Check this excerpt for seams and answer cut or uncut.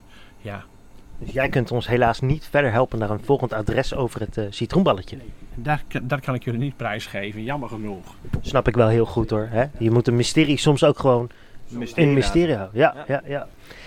uncut